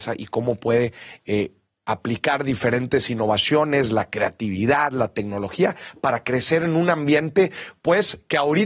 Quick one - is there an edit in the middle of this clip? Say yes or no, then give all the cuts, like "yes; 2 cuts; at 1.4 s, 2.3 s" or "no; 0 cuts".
no; 0 cuts